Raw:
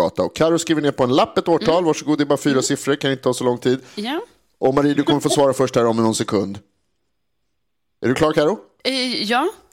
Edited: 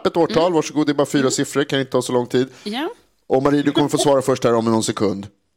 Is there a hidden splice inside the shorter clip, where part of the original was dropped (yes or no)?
no